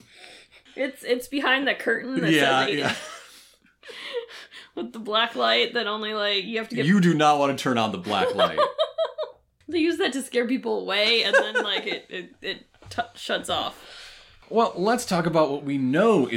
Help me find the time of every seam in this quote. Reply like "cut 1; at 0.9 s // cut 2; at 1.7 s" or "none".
none